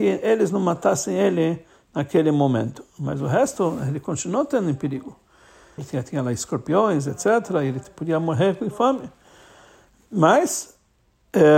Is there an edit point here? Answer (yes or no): yes